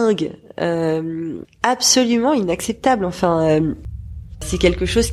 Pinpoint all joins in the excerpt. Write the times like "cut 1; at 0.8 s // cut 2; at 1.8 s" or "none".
none